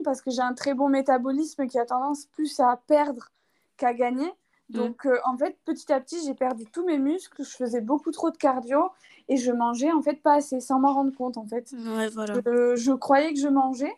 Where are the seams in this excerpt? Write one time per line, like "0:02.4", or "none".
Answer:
none